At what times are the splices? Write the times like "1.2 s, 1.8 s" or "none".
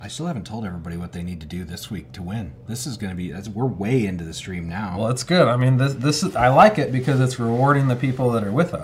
2.7 s